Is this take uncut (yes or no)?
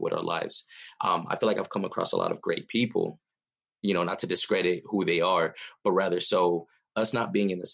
yes